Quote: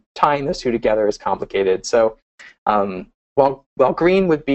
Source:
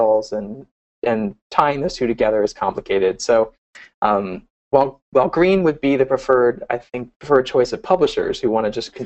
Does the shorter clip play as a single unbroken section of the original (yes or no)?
yes